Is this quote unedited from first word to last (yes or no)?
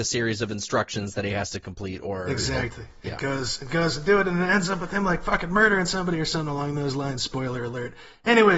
yes